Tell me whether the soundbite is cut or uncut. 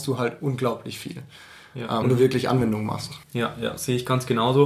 cut